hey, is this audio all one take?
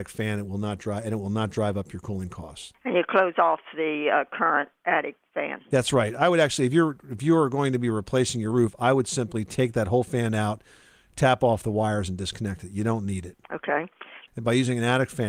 no; 1 cut; at 14.3 s

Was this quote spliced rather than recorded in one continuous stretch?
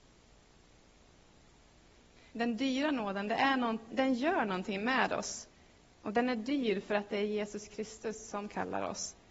yes; 3 cuts; at 2.3 s, 3.9 s, 5.9 s

